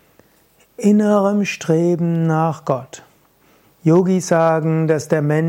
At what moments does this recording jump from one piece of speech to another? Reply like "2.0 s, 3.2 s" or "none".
3.6 s